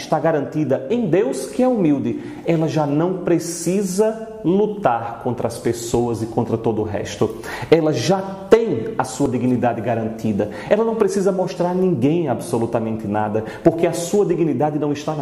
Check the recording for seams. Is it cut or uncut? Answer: uncut